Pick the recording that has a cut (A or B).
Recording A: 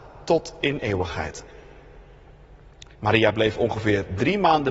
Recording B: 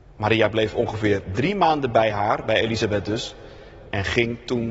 A